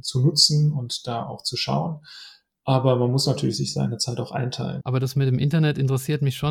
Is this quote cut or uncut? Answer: cut